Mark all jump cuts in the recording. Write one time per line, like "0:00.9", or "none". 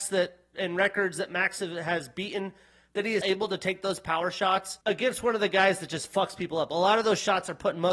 0:03.2
0:04.8